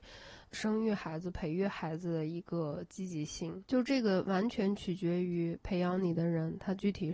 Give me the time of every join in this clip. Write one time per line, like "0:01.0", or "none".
0:03.6